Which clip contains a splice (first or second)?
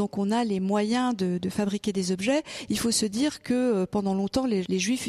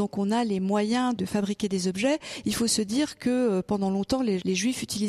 second